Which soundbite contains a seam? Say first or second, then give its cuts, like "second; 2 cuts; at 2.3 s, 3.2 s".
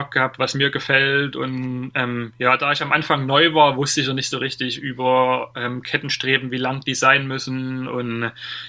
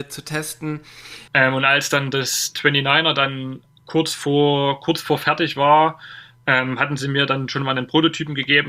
second; 1 cut; at 1.3 s